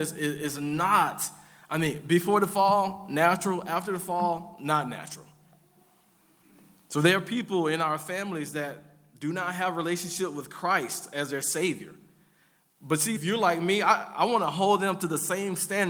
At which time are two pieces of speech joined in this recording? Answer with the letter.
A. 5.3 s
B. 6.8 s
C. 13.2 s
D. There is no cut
C